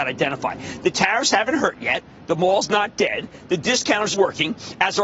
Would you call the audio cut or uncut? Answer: cut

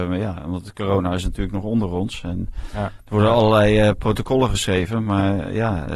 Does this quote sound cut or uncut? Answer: uncut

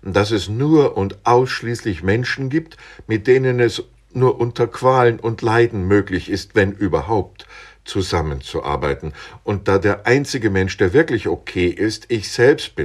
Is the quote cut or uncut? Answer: uncut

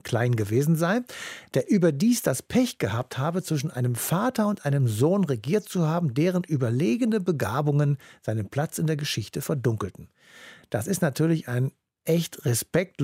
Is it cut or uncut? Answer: uncut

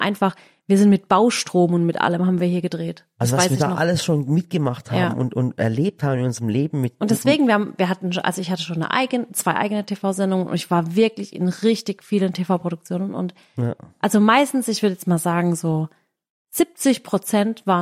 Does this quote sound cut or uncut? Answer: uncut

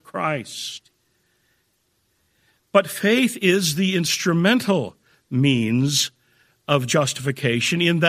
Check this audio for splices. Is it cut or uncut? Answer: uncut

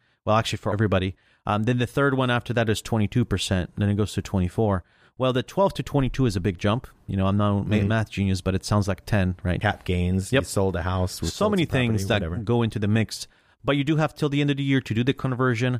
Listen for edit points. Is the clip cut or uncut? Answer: cut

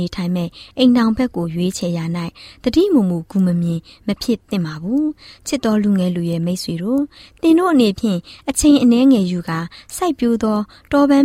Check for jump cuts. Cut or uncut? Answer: uncut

